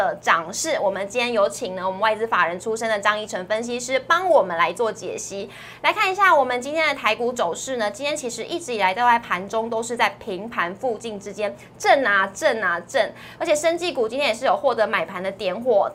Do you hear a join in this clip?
yes; 1 cut; at 13.4 s

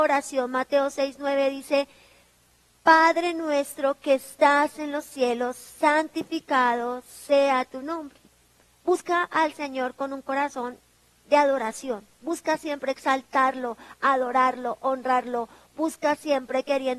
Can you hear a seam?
no; 0 cuts

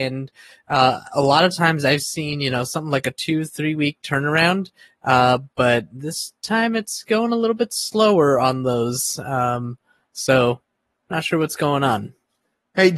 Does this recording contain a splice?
no; 0 cuts

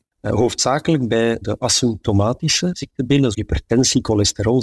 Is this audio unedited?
no; 2 cuts; at 1.4 s, 3.3 s

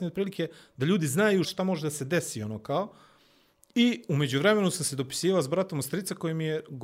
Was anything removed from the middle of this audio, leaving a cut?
yes; 1 cut; at 1.4 s

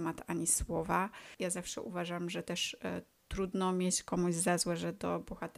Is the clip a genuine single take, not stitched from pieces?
no; 1 cut; at 1.4 s

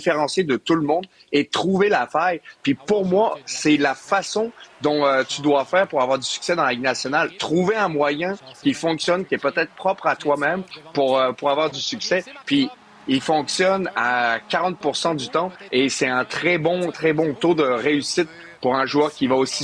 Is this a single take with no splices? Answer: yes; 0 cuts

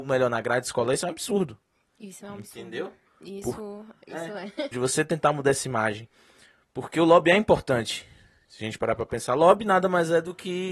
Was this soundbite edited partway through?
yes; 1 cut; at 4.7 s

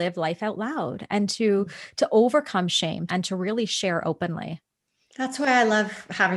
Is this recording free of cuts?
no; 1 cut; at 3.1 s

